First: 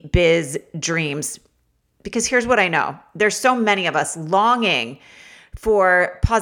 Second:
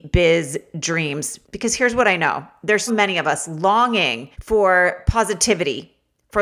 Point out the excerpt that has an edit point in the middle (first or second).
second